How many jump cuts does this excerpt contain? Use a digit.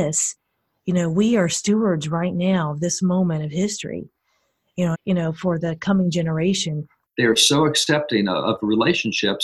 2